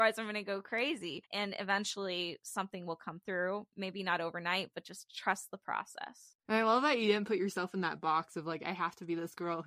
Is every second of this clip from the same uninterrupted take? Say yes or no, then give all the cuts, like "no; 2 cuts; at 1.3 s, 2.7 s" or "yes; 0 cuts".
no; 1 cut; at 1.3 s